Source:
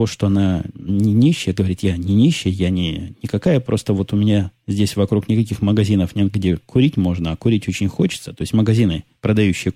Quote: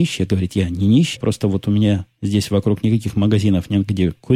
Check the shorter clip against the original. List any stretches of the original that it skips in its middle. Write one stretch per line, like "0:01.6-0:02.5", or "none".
0:02.4-0:03.6